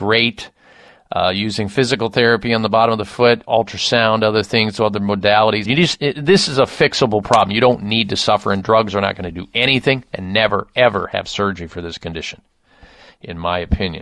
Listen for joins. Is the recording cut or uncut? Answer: cut